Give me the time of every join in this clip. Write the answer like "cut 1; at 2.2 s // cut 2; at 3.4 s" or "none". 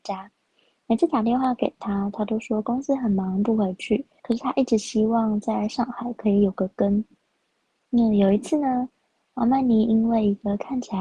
cut 1; at 4.2 s